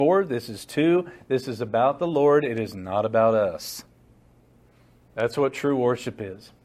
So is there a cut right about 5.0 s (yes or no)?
no